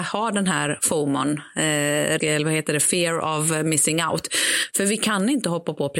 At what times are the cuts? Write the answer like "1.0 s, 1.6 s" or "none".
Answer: 2.2 s